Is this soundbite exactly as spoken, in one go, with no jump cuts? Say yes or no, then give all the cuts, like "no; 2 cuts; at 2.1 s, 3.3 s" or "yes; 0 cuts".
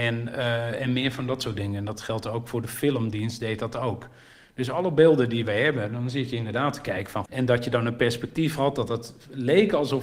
no; 1 cut; at 7.3 s